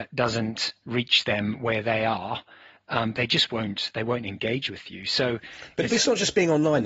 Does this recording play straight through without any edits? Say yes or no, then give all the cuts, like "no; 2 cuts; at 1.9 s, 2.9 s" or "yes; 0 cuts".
yes; 0 cuts